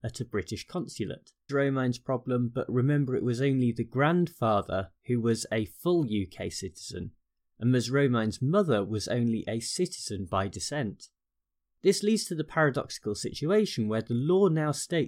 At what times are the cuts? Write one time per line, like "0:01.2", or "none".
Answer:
0:01.5